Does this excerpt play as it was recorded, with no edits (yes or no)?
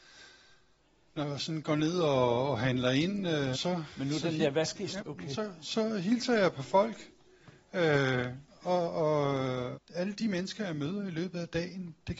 no